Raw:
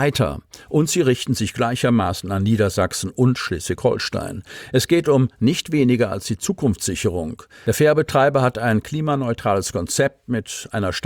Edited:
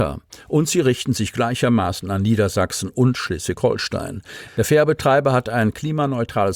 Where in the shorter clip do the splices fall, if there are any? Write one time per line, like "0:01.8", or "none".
0:04.5